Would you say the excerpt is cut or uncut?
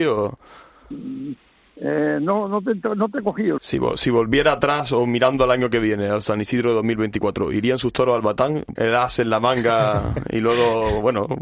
cut